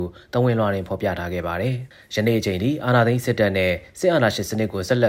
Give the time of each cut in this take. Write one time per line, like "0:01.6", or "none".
0:01.9